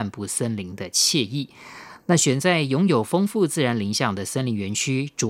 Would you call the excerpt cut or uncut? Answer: uncut